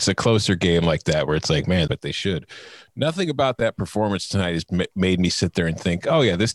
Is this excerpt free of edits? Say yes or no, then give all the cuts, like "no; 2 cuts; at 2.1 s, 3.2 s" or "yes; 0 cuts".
no; 1 cut; at 1.9 s